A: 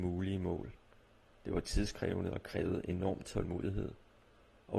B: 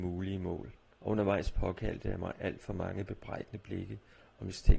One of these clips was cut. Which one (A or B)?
B